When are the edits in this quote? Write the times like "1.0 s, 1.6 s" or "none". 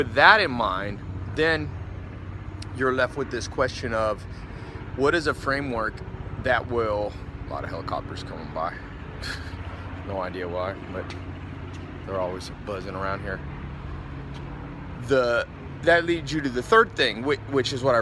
none